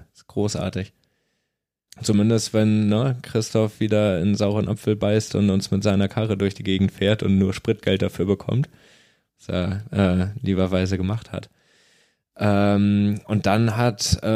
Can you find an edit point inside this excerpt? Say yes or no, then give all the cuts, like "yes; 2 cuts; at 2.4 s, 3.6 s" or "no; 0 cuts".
yes; 1 cut; at 1.9 s